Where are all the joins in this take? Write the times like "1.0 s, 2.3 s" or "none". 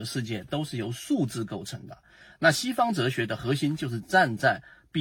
none